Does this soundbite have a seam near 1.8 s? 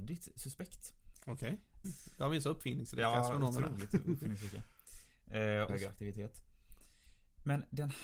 yes; 2 cuts; at 1.8 s, 5.7 s

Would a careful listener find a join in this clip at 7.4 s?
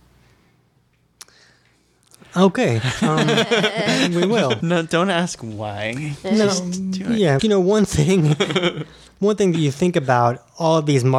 yes; 2 cuts; at 4.6 s, 7.4 s

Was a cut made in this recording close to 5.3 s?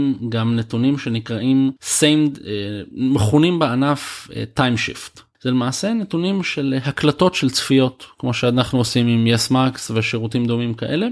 yes; 2 cuts; at 1.8 s, 5.3 s

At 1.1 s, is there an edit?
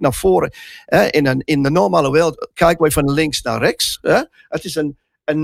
no; 0 cuts

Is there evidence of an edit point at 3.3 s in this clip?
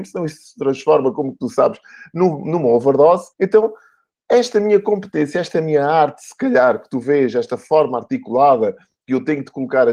yes; 1 cut; at 3.3 s

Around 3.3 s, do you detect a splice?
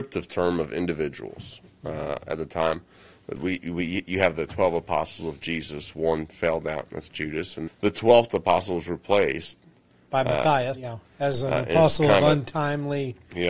no; 2 cuts; at 7.7 s, 10.7 s

